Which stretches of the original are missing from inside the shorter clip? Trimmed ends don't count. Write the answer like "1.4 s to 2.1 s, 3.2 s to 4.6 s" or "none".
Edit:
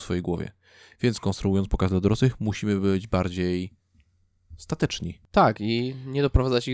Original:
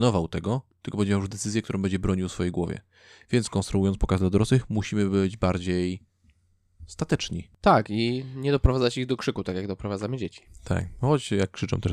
none

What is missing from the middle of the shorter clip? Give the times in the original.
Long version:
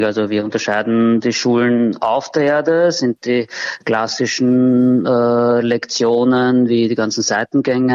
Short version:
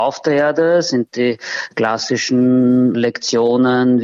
5.0 s to 5.6 s

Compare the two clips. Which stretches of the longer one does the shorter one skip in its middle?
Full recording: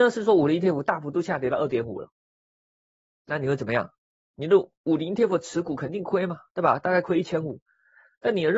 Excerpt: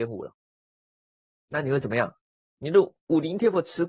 none

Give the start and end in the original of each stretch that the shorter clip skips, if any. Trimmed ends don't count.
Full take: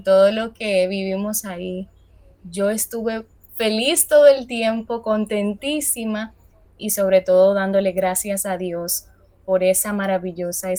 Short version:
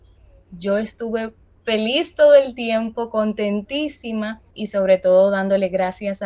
6.4 s to 6.7 s

